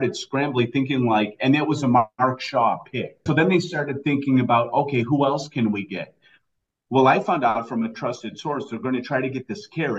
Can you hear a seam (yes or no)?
yes